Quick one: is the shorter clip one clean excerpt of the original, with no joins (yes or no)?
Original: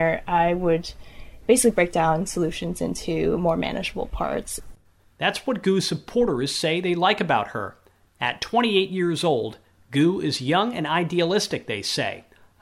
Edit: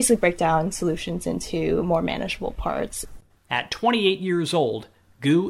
no